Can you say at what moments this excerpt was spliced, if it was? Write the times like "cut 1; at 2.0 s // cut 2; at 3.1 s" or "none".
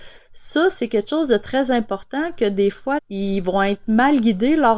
cut 1; at 3.0 s